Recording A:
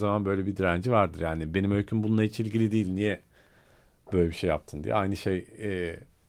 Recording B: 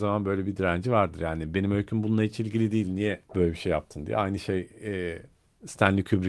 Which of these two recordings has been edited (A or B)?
B